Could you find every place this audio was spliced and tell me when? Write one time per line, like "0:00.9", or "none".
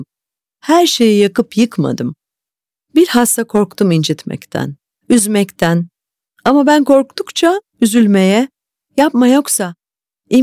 0:04.9